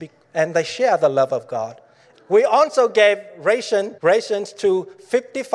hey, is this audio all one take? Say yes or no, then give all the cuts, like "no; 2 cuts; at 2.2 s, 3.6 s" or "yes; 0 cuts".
no; 2 cuts; at 2.1 s, 4.0 s